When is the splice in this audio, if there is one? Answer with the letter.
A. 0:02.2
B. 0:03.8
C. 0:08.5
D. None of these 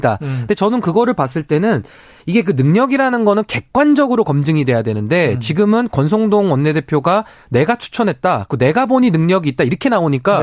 D